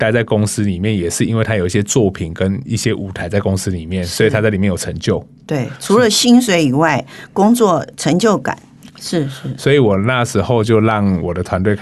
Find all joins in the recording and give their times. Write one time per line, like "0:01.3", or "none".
0:08.9